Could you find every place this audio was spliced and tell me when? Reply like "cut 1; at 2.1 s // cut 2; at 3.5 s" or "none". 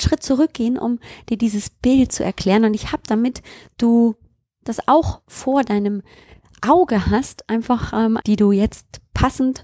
cut 1; at 8.2 s